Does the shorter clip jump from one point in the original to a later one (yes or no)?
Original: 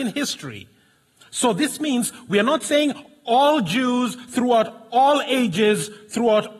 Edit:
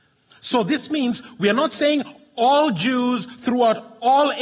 no